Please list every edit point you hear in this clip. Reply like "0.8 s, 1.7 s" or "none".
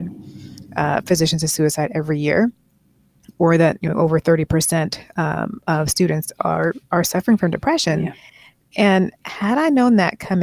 none

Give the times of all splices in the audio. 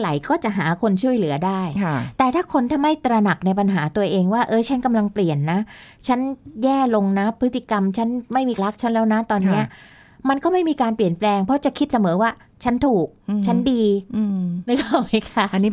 8.6 s

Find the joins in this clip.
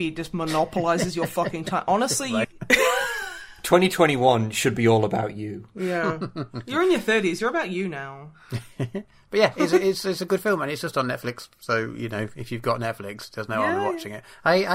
2.4 s

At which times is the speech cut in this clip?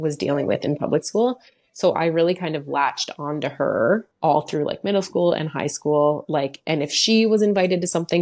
4.1 s

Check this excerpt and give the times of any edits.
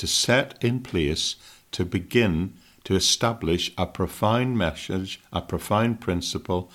none

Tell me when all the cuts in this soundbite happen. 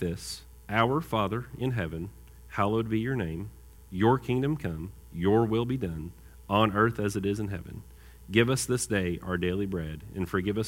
none

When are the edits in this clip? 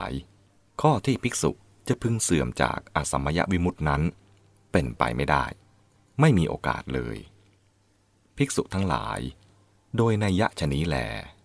none

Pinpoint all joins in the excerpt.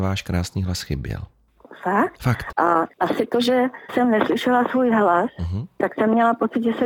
2.5 s

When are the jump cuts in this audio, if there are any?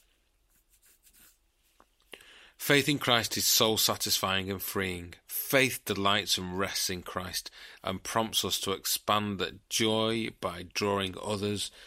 7.8 s

